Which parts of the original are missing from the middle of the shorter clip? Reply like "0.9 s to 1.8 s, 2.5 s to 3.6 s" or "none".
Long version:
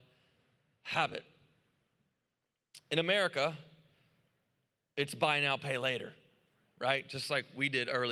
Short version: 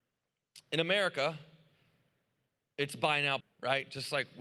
5.6 s to 6.6 s